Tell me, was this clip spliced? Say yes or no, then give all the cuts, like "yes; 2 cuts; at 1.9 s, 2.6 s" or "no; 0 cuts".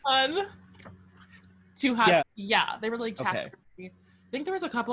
yes; 1 cut; at 2.2 s